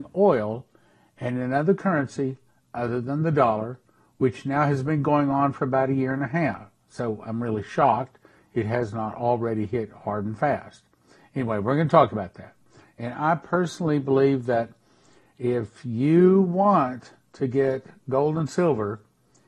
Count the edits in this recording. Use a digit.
1